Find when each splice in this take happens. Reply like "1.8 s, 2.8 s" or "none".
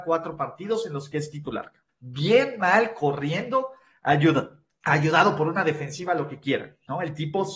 1.9 s